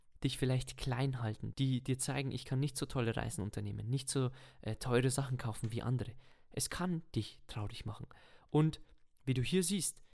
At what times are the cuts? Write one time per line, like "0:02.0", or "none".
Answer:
0:01.5